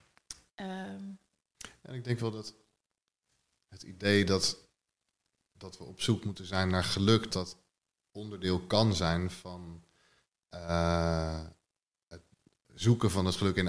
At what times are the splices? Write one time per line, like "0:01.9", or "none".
0:07.3